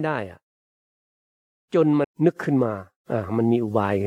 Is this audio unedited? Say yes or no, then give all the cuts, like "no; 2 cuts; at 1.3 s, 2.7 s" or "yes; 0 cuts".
no; 1 cut; at 2.0 s